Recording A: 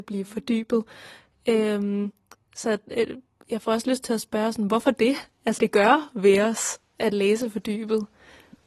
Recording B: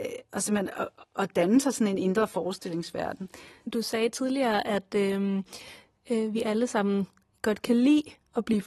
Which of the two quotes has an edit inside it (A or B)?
A